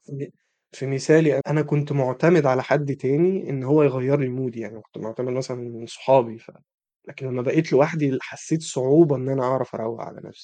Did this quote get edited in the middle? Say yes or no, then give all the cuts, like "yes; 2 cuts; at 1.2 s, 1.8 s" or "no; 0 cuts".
yes; 1 cut; at 1.4 s